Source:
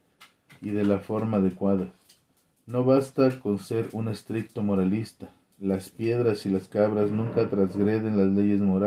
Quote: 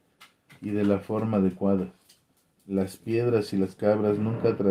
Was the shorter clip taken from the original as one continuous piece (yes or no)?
no